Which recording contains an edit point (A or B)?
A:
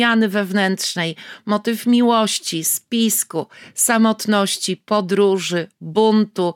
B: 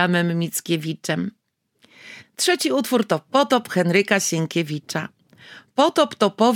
B